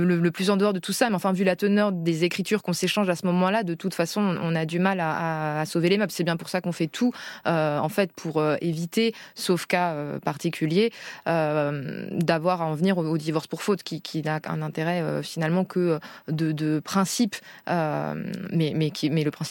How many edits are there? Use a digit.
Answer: 0